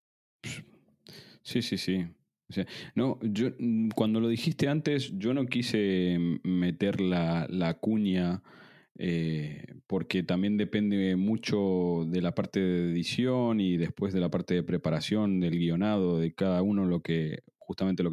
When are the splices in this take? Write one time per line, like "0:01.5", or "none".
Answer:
none